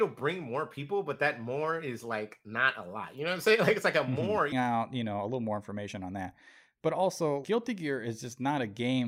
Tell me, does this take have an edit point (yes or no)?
yes